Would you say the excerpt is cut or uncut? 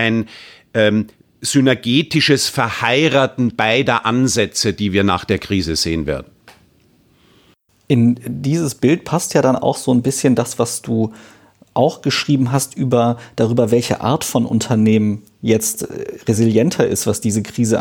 uncut